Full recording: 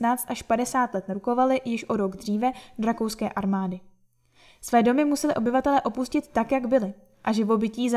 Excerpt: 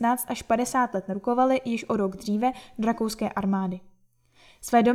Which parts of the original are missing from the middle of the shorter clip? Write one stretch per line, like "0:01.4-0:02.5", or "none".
none